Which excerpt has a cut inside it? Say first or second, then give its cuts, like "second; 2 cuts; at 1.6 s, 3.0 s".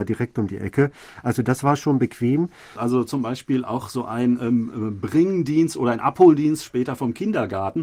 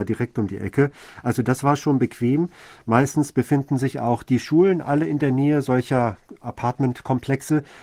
first; 1 cut; at 2.8 s